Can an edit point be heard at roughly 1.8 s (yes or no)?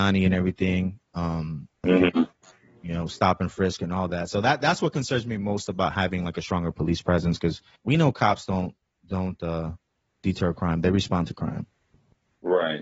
yes